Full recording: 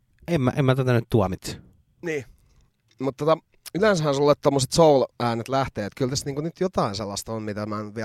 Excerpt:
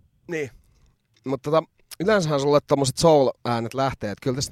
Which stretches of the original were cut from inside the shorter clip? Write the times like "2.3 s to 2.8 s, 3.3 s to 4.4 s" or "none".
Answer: none